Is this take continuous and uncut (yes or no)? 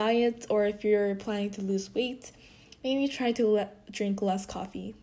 yes